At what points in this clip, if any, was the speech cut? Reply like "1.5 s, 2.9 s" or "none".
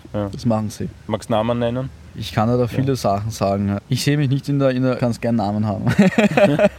5.0 s